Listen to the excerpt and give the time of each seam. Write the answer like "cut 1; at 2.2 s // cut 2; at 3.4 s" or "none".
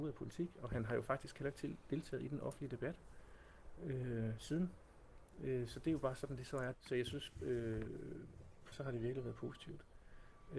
cut 1; at 6.7 s // cut 2; at 8.7 s